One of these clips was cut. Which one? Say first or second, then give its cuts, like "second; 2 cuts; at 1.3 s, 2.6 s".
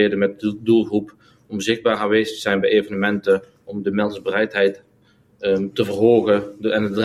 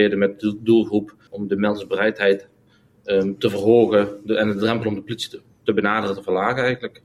second; 1 cut; at 1.3 s